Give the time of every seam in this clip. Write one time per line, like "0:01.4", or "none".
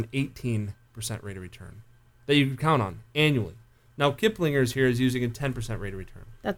none